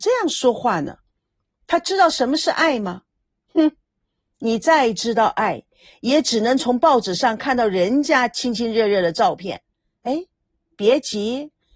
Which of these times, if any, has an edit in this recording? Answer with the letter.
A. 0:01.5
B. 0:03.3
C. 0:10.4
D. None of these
A